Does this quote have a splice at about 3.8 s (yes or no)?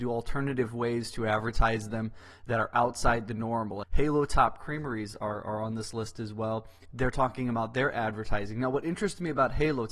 yes